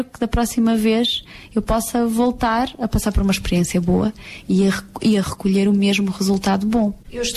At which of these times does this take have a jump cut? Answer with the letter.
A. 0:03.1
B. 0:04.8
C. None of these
C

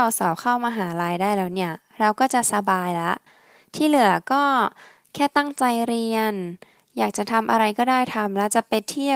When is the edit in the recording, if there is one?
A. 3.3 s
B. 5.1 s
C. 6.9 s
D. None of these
D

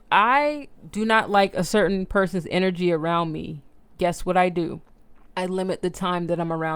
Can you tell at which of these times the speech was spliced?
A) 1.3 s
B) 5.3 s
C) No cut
B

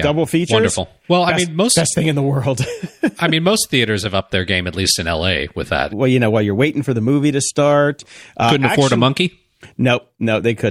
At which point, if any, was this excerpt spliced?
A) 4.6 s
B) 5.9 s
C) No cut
B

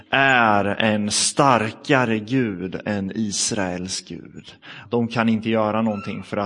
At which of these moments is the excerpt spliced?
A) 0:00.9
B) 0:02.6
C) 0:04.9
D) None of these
C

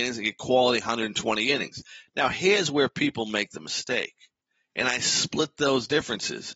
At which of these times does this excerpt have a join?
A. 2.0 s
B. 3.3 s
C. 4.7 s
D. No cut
C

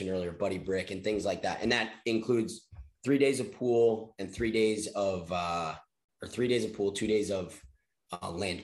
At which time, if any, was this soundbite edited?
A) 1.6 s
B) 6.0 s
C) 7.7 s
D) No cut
D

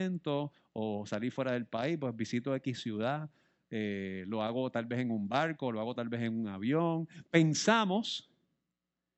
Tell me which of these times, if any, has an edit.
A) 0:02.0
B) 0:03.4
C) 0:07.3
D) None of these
D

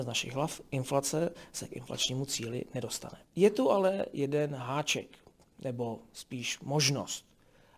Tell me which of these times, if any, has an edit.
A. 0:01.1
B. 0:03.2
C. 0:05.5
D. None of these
B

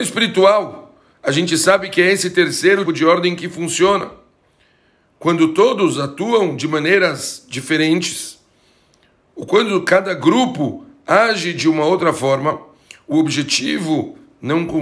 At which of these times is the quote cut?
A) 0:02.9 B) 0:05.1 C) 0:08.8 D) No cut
A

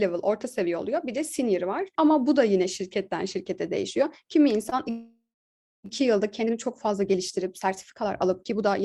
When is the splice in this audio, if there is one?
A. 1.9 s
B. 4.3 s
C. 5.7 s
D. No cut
A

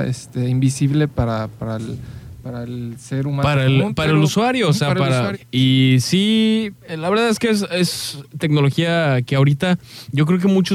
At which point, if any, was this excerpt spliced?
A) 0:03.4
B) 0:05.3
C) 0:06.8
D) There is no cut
B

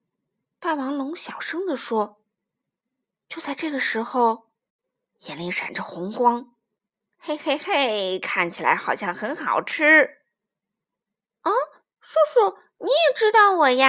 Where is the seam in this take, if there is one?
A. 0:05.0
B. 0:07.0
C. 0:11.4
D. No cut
A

